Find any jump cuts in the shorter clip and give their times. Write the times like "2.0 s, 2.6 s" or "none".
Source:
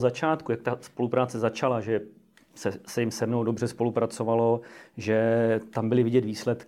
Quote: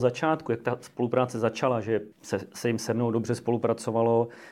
2.1 s